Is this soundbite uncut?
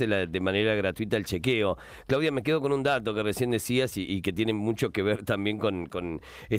yes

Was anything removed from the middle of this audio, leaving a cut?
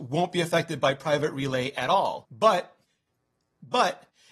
no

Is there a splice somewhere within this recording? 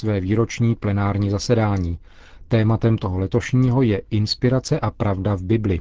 no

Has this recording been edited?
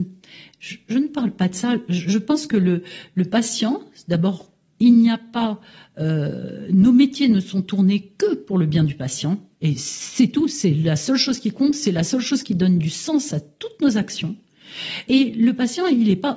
no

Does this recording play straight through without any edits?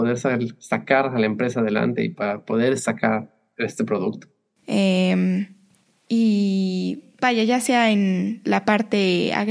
no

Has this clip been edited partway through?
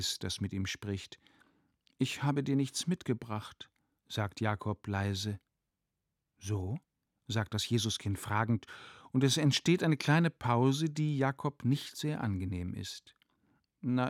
no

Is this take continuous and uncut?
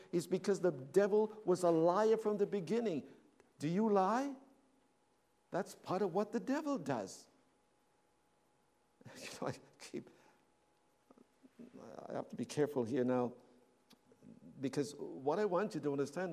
yes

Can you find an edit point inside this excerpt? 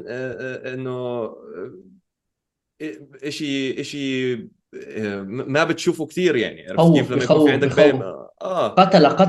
no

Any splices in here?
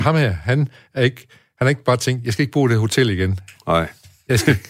no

